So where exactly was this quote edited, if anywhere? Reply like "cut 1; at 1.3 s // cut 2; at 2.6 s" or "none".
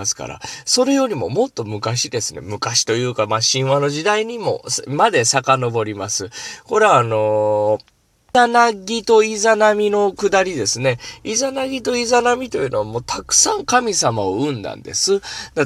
none